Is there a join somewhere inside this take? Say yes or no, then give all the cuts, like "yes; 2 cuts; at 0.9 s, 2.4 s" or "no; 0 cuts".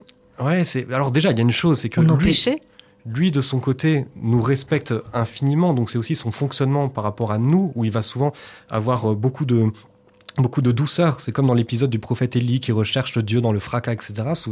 no; 0 cuts